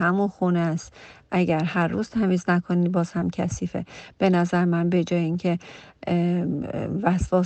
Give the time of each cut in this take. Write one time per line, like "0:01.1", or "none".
none